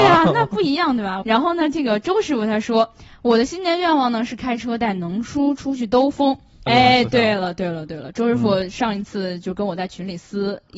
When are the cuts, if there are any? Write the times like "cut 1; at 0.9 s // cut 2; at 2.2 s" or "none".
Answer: cut 1; at 1.2 s // cut 2; at 6.7 s